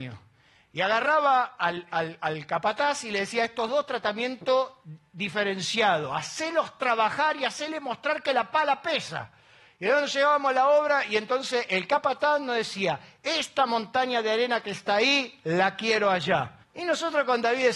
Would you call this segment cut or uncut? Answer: cut